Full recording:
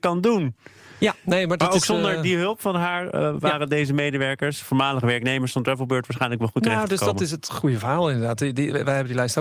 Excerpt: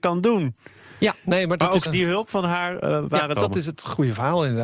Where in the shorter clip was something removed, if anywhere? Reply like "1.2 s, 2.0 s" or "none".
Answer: 1.9 s, 3.4 s